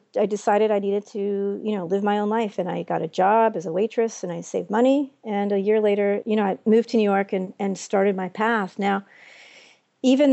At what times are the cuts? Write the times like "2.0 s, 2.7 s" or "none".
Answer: none